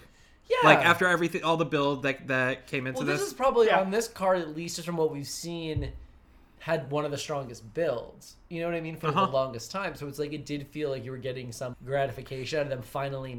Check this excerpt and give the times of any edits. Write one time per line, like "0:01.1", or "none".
0:11.7

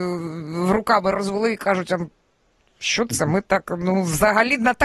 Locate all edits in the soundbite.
none

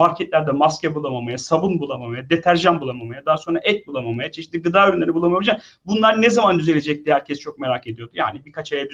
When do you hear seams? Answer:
none

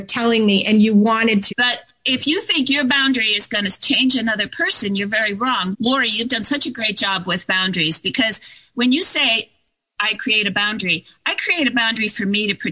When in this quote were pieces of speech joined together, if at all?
0:01.5
0:05.7

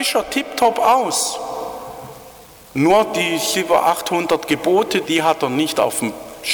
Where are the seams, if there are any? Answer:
0:05.0

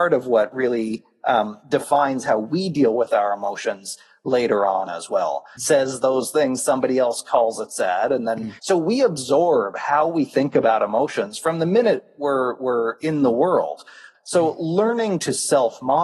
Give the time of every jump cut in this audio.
0:05.6
0:08.6
0:14.1

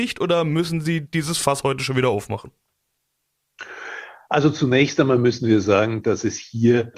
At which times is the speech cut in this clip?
none

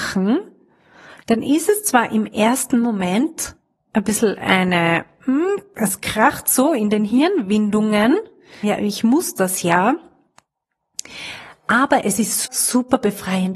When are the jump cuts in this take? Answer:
0:08.6
0:12.4

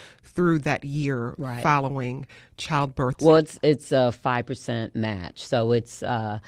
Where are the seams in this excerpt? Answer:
0:03.1

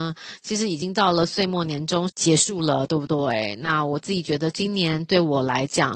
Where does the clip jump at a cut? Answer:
0:02.1

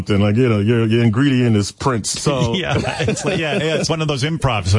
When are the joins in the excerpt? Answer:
0:02.2
0:03.9

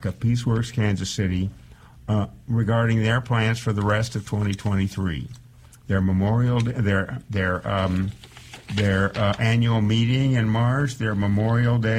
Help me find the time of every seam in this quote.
none

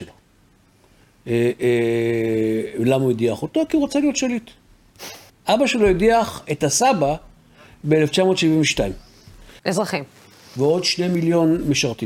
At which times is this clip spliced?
0:05.3
0:09.6

